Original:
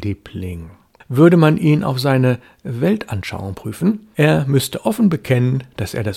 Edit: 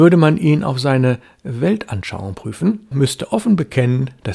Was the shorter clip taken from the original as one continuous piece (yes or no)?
no